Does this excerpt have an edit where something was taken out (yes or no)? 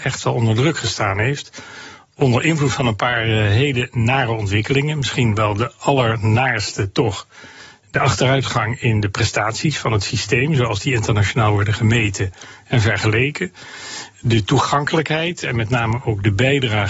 no